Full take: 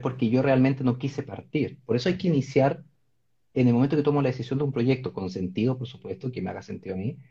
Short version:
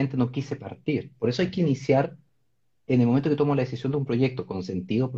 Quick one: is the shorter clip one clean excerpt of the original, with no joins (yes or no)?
yes